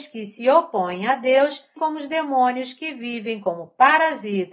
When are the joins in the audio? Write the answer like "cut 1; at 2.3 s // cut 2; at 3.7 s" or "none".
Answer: cut 1; at 1.8 s